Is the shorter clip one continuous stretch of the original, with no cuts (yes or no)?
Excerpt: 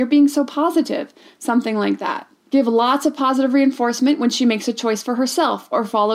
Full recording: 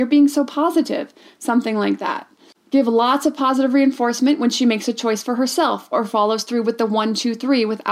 no